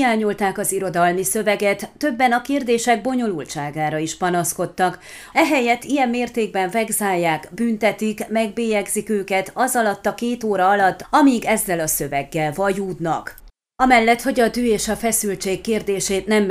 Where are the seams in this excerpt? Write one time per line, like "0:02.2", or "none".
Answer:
0:05.3